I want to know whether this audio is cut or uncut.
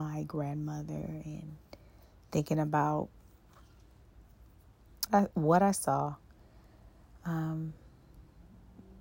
cut